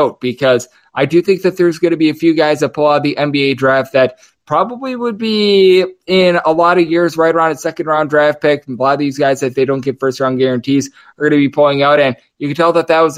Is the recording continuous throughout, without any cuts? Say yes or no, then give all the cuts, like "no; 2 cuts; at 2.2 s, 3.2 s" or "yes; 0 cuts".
yes; 0 cuts